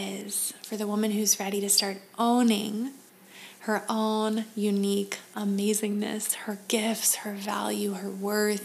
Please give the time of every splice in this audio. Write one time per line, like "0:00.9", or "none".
none